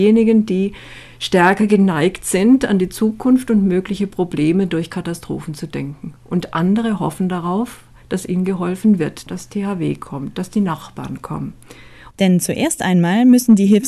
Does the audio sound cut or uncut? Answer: cut